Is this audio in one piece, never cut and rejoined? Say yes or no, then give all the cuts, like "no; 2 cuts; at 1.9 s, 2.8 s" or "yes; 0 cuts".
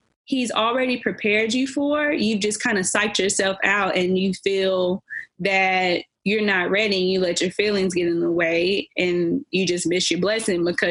yes; 0 cuts